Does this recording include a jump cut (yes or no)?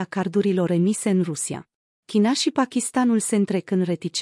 yes